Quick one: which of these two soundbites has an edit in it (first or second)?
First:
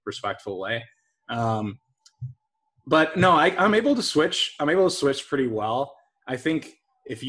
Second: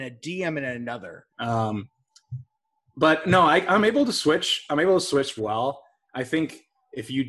second